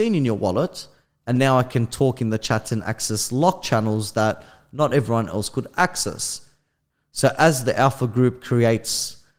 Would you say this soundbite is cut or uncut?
cut